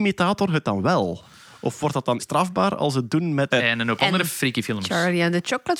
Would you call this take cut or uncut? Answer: cut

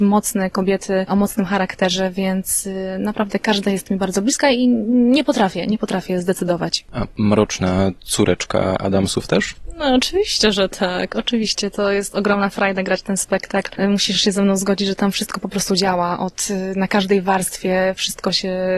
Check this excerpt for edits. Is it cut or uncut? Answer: uncut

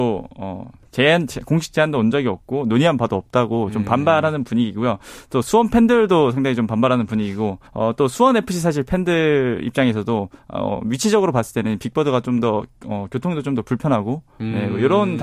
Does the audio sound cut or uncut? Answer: cut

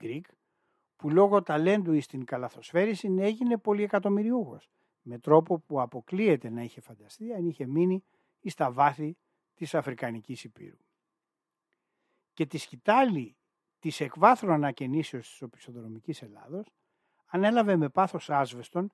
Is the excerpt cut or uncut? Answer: uncut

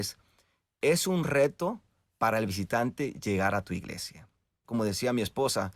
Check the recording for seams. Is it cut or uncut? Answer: cut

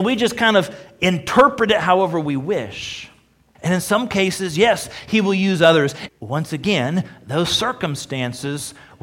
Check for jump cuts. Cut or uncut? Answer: cut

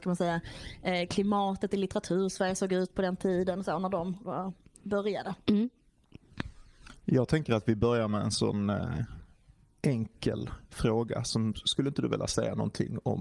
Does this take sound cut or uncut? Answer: uncut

